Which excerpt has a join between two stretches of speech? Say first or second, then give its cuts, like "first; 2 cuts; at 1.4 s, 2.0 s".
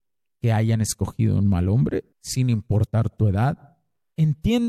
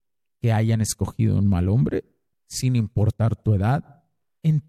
first; 1 cut; at 2.1 s